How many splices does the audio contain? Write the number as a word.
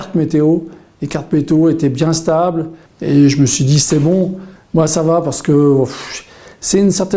two